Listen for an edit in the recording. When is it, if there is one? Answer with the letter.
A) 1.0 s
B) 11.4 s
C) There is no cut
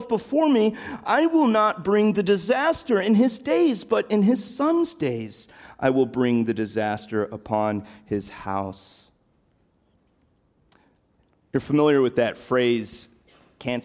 C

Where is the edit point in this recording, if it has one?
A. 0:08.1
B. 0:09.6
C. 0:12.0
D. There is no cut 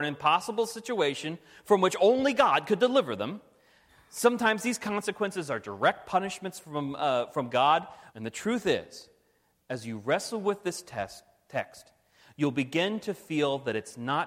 A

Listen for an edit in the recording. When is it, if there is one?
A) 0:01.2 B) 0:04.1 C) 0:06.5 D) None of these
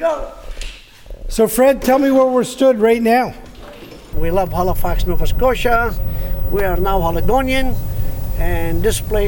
B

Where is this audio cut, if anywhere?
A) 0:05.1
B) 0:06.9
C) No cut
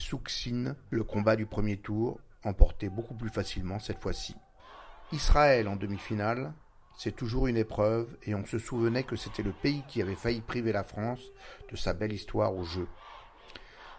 C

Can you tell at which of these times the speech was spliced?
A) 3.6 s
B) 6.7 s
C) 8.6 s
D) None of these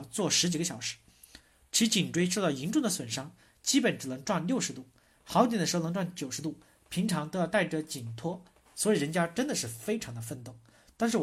C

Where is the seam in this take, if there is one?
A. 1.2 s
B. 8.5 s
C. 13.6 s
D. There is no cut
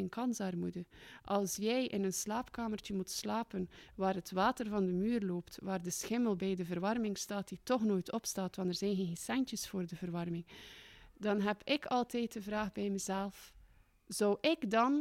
D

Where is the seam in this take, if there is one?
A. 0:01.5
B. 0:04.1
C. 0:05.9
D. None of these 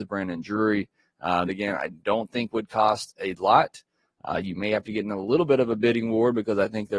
A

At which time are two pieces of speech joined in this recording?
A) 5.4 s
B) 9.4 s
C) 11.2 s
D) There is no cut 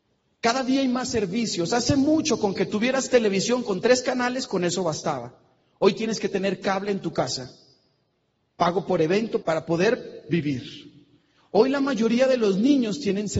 B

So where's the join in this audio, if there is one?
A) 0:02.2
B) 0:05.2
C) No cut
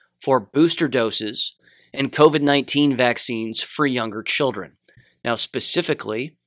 C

